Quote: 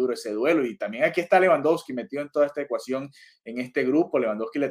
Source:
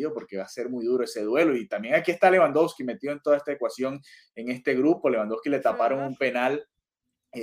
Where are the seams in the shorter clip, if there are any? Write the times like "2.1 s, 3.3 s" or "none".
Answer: none